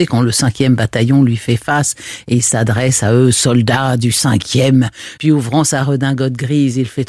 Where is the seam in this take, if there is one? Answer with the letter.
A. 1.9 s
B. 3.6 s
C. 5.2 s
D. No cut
C